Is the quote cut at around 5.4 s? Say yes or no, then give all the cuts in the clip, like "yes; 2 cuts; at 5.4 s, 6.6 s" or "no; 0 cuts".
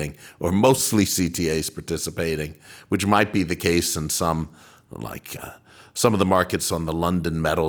yes; 1 cut; at 5.4 s